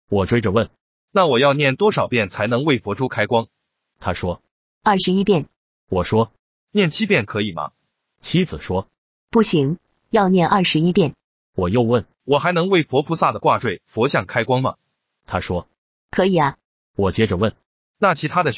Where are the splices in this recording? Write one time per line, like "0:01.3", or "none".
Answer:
0:12.2